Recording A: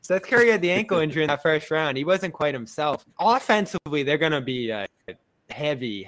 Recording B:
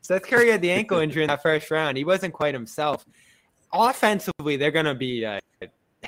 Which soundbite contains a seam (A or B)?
A